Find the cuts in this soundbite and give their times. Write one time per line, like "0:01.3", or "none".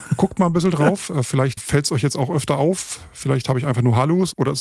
0:01.6

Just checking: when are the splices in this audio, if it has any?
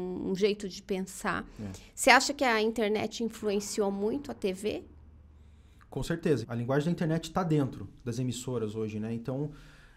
0:06.4

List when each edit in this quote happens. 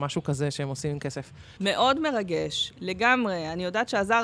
0:01.6

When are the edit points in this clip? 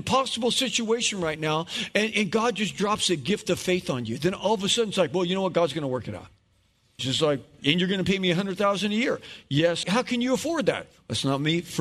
0:07.0
0:09.8

